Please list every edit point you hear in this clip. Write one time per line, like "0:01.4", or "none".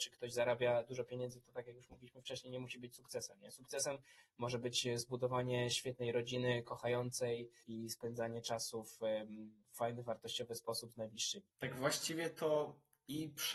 0:07.6
0:11.5